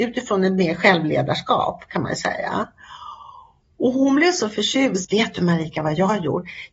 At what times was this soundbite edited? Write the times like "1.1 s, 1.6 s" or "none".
5.0 s